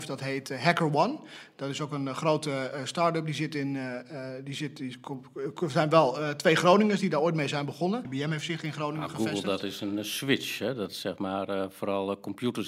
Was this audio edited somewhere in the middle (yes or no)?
yes